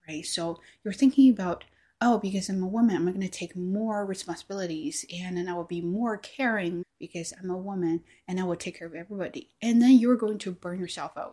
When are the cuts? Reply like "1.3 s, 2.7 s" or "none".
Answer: 6.8 s